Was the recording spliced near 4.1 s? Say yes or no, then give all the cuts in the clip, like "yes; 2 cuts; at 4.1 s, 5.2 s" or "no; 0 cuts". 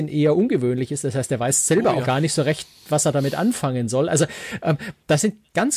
no; 1 cut; at 2.0 s